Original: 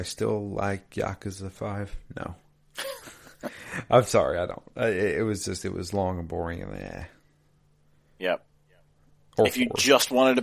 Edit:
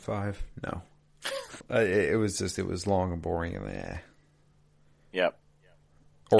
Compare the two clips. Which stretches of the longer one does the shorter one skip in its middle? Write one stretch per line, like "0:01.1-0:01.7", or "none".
0:03.1-0:04.7